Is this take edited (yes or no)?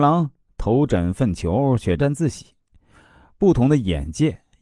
yes